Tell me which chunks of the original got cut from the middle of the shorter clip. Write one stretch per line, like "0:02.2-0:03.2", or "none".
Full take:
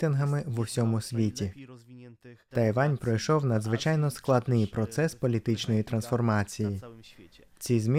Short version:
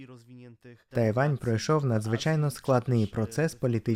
none